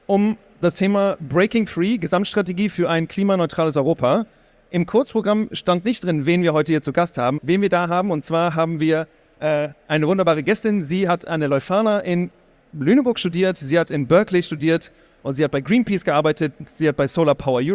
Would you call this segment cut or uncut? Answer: cut